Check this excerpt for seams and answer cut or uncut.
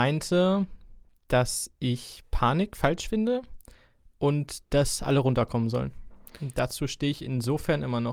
uncut